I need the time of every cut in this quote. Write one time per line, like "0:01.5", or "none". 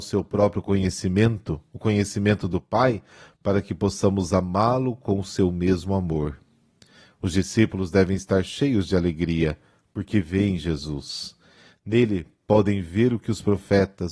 none